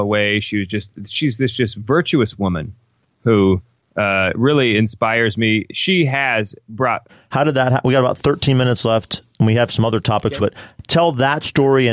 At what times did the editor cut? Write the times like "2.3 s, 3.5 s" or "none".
7.1 s, 10.4 s